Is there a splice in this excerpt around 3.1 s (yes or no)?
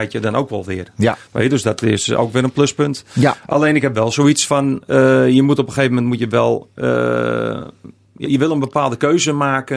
no